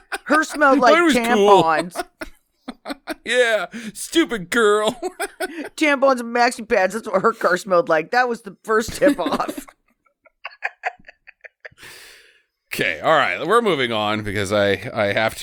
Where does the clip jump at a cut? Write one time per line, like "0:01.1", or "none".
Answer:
none